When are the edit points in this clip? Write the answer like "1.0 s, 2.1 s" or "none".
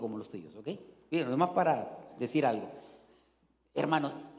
none